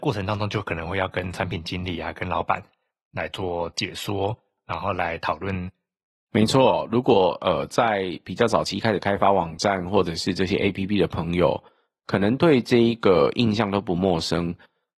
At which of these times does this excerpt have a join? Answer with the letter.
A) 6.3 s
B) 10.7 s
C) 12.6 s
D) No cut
A